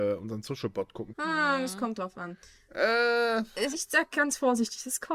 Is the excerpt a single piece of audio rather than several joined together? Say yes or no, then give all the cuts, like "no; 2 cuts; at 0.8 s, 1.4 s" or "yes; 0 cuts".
no; 2 cuts; at 1.1 s, 3.7 s